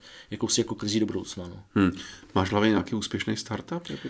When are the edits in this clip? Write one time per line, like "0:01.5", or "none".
none